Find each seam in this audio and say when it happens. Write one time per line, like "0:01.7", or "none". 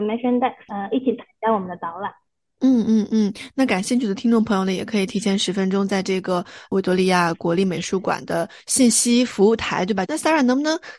0:10.0